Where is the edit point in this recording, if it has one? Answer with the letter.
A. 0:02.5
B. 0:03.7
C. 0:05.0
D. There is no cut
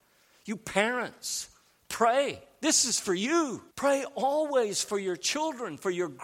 B